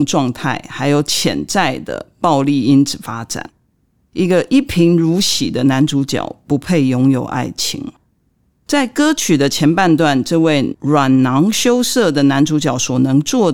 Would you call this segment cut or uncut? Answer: uncut